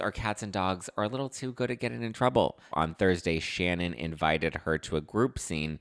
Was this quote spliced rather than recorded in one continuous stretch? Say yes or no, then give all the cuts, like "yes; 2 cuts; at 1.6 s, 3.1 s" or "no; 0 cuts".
yes; 1 cut; at 2.7 s